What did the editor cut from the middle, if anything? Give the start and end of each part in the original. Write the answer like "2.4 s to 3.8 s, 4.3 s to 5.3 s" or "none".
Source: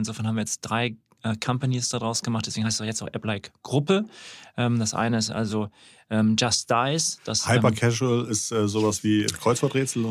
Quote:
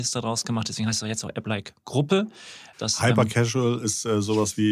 4.5 s to 7.2 s